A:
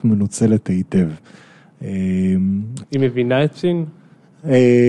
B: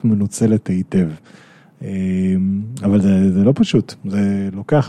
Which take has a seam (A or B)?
A